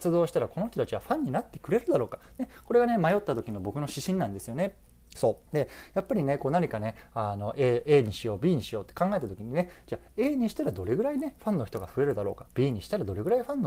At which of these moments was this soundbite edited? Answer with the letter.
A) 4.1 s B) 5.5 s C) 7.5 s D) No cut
B